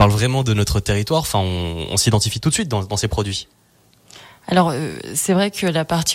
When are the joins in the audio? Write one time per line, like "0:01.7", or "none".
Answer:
none